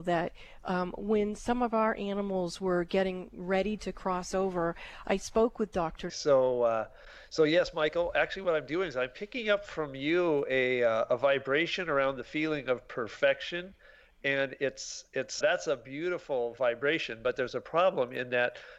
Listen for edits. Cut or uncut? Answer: cut